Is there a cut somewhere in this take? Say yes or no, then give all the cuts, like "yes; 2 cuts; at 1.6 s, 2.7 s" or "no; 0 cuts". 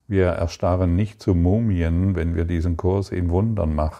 no; 0 cuts